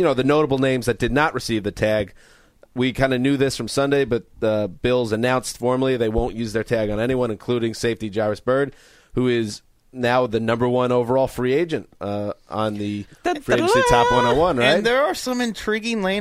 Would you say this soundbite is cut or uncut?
uncut